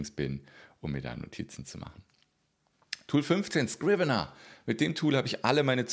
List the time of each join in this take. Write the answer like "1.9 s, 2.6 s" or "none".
none